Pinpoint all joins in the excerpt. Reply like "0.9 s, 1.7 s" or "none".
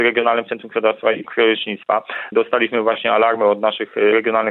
2.3 s